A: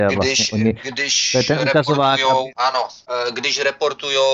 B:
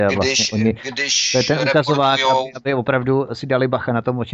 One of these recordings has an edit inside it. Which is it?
A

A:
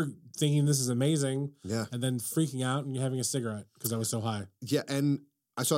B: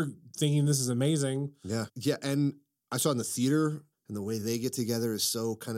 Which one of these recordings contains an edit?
B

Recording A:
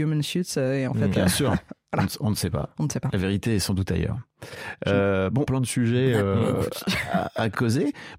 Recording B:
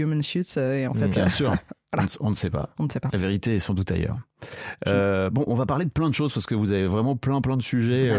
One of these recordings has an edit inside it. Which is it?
A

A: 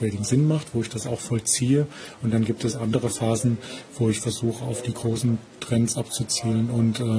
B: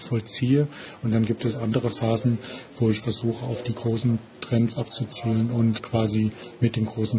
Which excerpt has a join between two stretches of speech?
B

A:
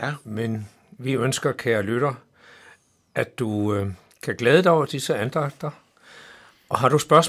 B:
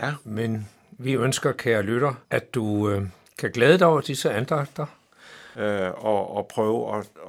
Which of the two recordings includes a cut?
B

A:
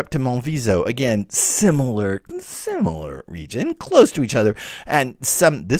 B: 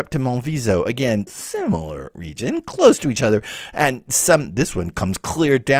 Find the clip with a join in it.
B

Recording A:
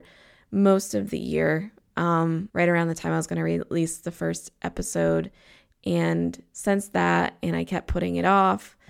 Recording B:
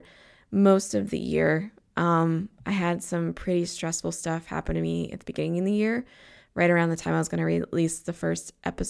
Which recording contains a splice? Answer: A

